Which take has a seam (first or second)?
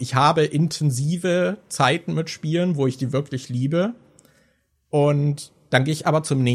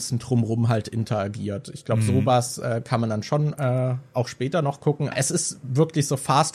second